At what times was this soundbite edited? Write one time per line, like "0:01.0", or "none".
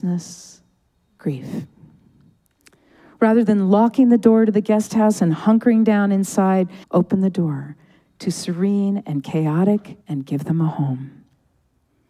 0:06.8
0:10.0